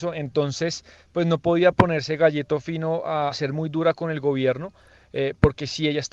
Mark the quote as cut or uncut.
cut